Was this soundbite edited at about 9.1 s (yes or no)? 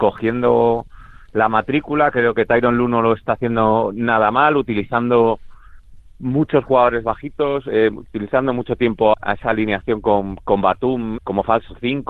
yes